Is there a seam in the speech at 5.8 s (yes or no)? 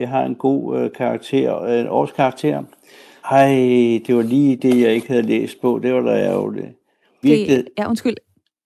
no